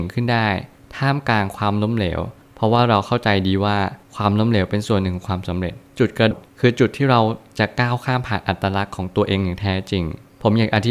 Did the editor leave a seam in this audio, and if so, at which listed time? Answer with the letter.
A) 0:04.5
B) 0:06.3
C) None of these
B